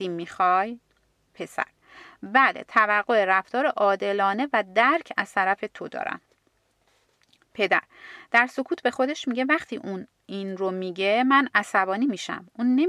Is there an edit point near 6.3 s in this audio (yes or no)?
no